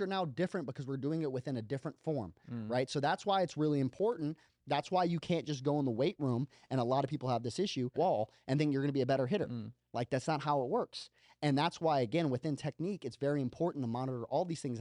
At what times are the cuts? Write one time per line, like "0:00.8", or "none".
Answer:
0:07.9

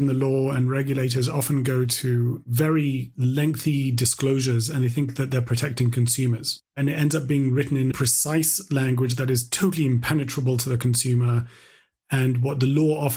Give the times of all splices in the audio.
0:06.7
0:07.9

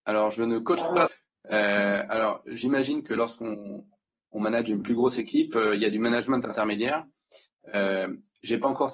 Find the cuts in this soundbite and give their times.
0:01.1

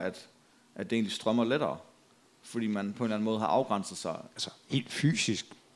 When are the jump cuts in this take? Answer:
0:04.3

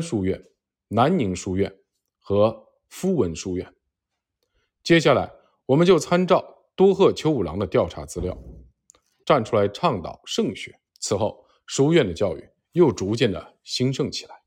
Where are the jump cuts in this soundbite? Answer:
0:09.2
0:10.9

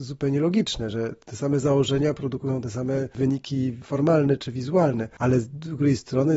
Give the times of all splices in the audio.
none

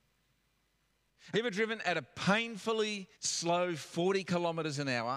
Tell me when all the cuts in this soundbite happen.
0:01.3
0:03.1

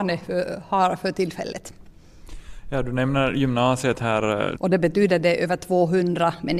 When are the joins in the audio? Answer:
0:04.6

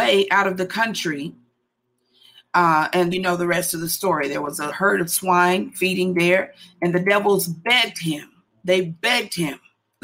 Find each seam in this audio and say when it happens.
0:03.1
0:04.7

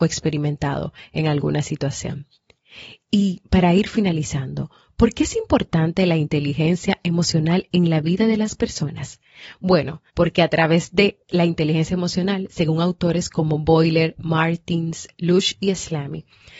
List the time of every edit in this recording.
0:10.1

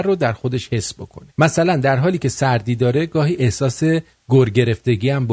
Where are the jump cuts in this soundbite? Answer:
0:01.3

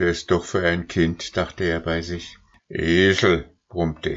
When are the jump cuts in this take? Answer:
0:01.3
0:02.6

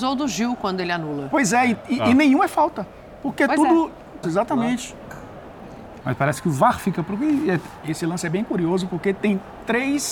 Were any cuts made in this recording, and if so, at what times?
0:04.2
0:06.0
0:07.8

